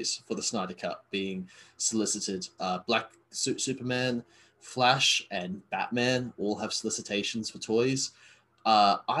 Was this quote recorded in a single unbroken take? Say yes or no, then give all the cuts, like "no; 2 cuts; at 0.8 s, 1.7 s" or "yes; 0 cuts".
no; 2 cuts; at 1.1 s, 2.6 s